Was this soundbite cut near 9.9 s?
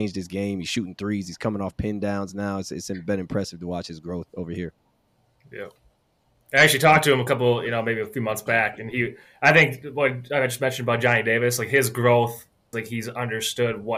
no; 1 cut; at 12.7 s

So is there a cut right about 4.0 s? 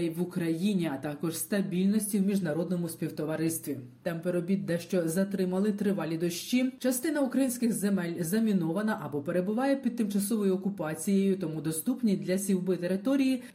yes; 1 cut; at 4.0 s

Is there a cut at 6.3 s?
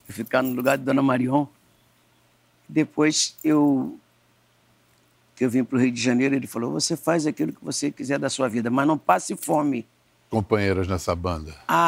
no; 1 cut; at 10.3 s

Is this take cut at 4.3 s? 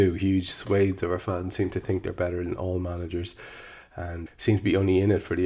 yes; 1 cut; at 4.3 s

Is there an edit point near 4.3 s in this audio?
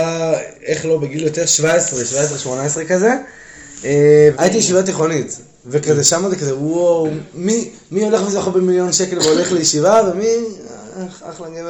yes; 1 cut; at 4.3 s

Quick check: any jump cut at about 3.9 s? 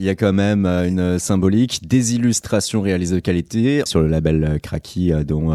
yes; 1 cut; at 3.9 s

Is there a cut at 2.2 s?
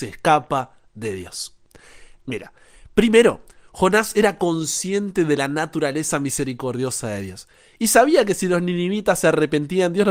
yes; 1 cut; at 2.2 s

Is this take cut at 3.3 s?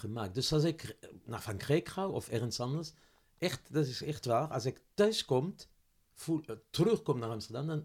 no; 1 cut; at 2.1 s

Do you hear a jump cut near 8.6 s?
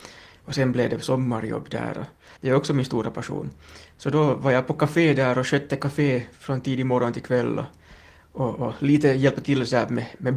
no; 1 cut; at 2.4 s

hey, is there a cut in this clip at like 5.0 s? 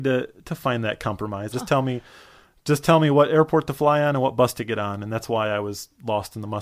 no; 1 cut; at 1.5 s

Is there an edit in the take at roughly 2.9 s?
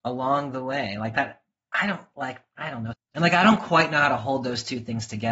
yes; 1 cut; at 2.9 s

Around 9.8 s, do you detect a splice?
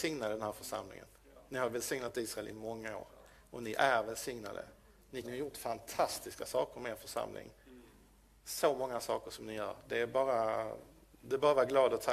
no; 1 cut; at 5.2 s

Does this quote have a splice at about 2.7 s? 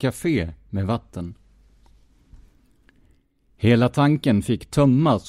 no; 0 cuts

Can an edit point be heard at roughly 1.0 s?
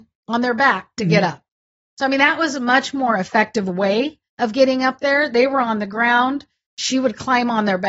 no; 1 cut; at 4.3 s

